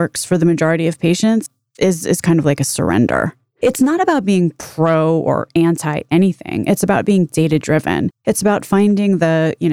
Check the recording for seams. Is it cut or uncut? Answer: uncut